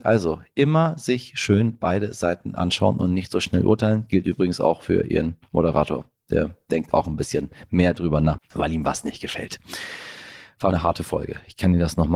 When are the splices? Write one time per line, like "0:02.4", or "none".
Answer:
0:08.4
0:10.7